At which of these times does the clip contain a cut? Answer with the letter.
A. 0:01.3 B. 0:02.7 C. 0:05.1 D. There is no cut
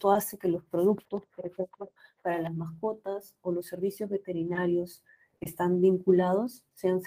D